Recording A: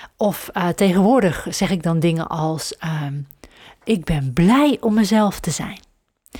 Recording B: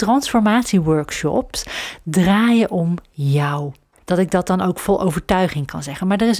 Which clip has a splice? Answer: B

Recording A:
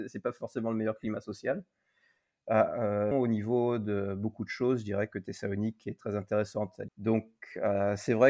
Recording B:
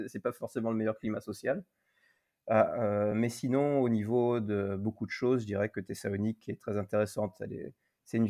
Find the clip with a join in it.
A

